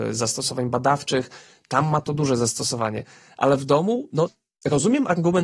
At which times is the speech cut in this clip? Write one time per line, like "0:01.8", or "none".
none